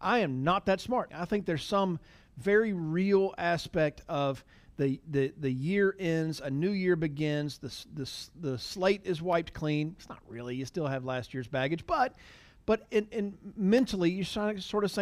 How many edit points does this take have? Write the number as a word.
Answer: one